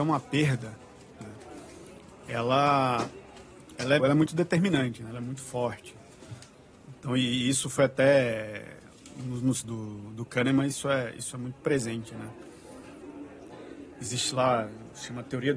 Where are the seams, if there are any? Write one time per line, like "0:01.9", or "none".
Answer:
0:04.0
0:09.6

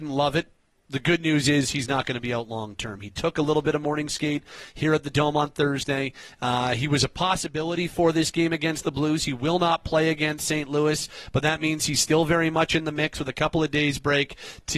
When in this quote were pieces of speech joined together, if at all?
none

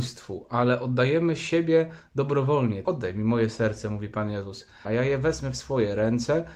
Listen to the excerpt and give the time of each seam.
0:02.8
0:04.8

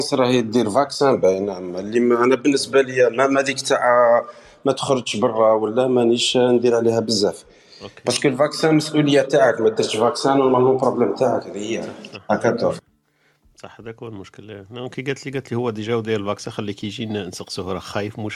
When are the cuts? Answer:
none

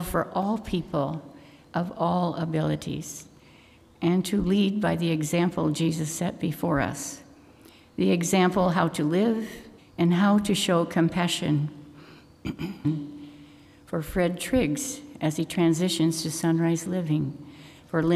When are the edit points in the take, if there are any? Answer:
0:09.8

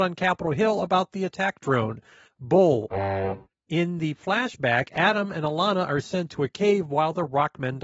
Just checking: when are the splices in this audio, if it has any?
0:02.3
0:03.5

